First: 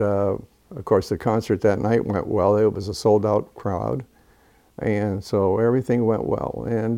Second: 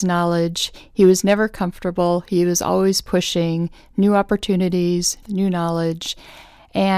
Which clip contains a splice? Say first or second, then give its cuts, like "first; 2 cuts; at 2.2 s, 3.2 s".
second; 1 cut; at 5.2 s